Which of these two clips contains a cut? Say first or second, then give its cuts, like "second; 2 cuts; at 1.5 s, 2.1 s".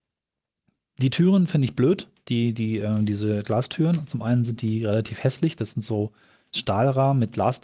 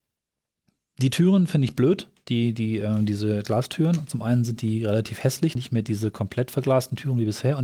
second; 1 cut; at 5.6 s